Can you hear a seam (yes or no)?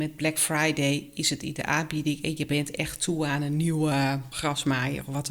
no